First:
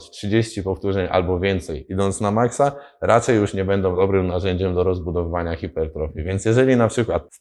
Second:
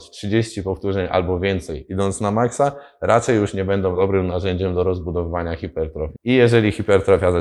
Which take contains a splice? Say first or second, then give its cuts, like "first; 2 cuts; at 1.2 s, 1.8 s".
second; 1 cut; at 6.2 s